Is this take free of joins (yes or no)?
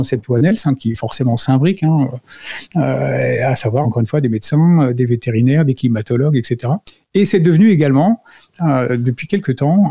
no